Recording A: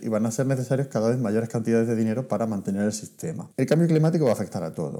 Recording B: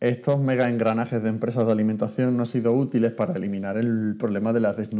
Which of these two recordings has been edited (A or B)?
A